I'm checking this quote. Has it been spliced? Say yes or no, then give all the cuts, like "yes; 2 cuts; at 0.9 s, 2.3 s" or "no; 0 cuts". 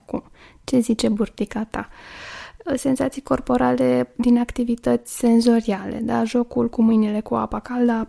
no; 0 cuts